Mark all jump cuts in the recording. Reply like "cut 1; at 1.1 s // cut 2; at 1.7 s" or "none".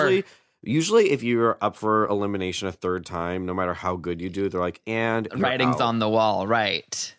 none